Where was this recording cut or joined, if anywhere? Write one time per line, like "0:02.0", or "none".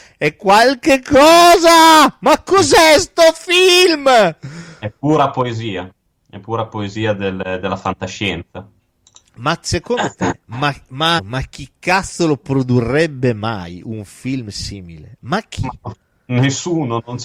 0:11.2